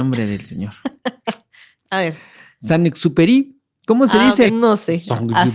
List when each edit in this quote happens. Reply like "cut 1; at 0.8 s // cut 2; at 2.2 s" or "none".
cut 1; at 4.5 s